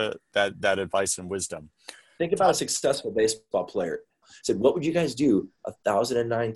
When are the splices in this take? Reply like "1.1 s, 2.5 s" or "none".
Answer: 4.2 s